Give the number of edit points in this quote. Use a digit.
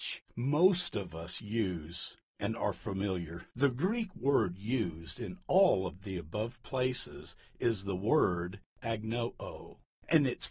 1